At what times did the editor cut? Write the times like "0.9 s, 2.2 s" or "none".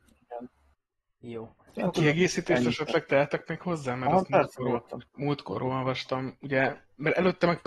5.1 s